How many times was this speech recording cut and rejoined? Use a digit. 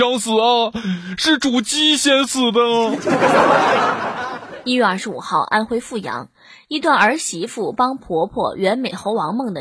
0